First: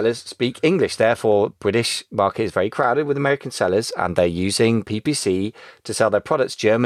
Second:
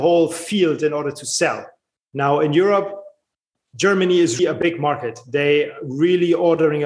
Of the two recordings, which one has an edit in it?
second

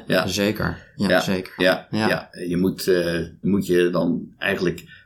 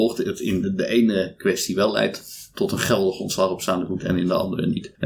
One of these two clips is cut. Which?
first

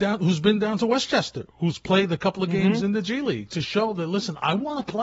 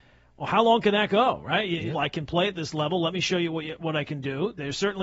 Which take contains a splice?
second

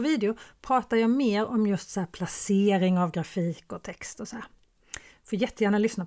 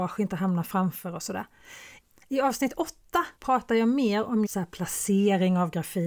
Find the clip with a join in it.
second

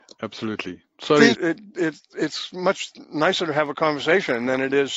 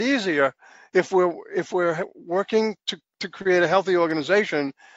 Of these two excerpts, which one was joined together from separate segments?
first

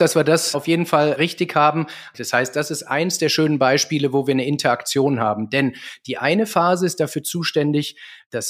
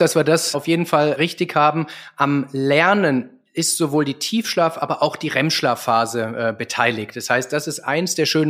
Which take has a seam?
first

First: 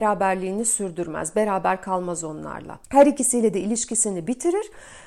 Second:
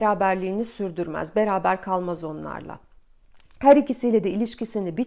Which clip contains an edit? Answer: first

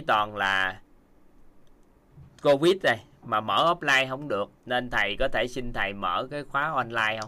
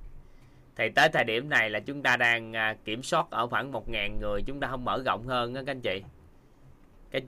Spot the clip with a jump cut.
first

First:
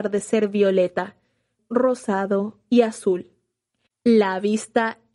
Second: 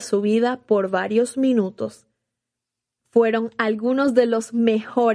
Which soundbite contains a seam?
first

